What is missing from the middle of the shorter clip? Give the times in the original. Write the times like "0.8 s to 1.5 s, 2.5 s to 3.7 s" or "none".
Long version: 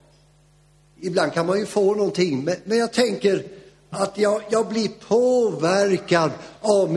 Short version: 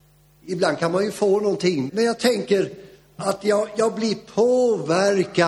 2.4 s to 2.6 s